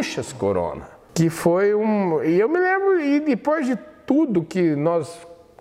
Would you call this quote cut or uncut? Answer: uncut